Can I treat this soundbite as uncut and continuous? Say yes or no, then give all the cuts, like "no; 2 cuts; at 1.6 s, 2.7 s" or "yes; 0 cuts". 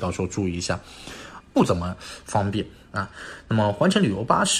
no; 1 cut; at 1.4 s